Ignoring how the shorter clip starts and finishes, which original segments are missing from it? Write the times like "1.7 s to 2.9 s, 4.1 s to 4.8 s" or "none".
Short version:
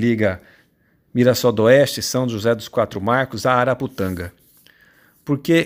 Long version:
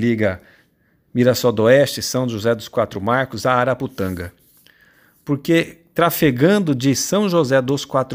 none